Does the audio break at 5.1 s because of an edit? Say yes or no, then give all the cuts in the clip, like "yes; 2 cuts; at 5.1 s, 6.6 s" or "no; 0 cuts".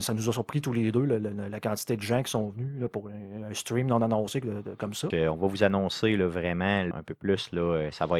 yes; 2 cuts; at 5.1 s, 6.9 s